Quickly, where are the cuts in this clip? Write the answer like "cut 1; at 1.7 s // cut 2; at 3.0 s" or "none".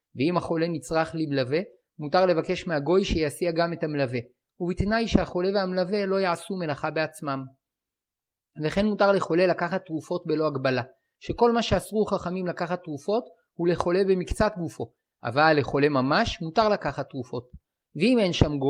none